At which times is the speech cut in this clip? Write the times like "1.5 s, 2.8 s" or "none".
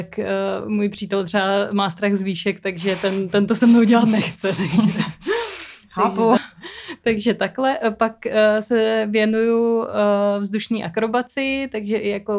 6.4 s